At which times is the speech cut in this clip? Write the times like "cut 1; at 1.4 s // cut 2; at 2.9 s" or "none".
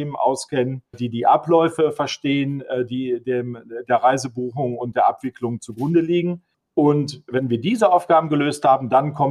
cut 1; at 0.9 s